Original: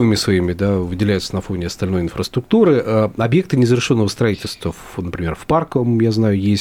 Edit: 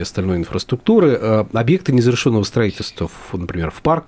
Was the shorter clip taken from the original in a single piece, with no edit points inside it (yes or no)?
yes